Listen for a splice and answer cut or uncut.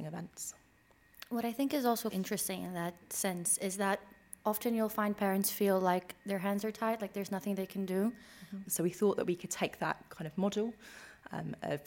cut